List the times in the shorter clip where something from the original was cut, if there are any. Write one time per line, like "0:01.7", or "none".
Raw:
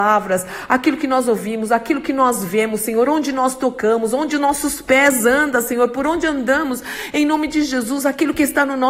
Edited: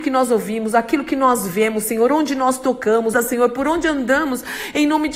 0:03.1